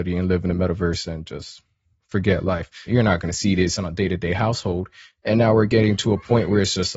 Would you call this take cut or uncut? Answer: cut